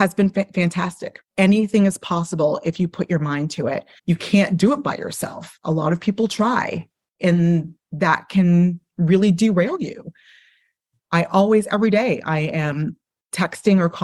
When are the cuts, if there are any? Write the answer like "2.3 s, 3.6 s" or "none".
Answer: 1.3 s, 4.0 s